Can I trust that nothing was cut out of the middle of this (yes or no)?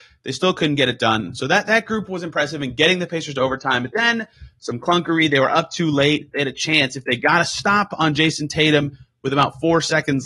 yes